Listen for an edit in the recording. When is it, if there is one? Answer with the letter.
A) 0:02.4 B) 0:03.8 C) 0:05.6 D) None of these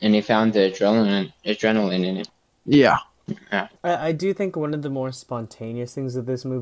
B